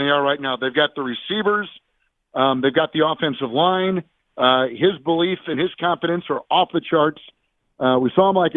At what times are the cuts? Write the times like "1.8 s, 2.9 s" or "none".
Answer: 4.2 s